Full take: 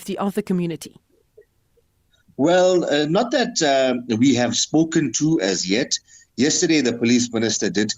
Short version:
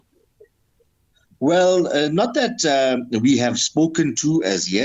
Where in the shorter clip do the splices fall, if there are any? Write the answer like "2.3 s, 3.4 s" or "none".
none